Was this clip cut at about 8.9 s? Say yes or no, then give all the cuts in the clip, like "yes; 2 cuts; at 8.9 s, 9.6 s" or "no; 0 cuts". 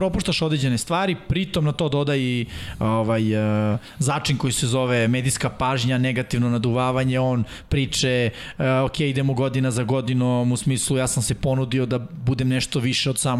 no; 0 cuts